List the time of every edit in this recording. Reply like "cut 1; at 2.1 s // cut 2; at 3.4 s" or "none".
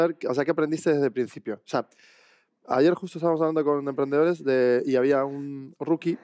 none